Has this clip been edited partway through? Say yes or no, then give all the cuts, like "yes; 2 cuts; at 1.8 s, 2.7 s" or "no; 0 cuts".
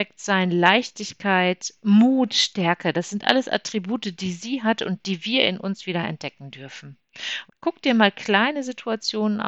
yes; 1 cut; at 7.5 s